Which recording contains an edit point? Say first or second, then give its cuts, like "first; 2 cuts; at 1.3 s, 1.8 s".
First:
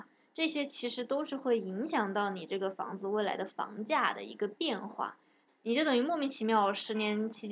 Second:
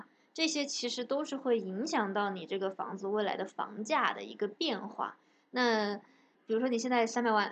first; 1 cut; at 5.5 s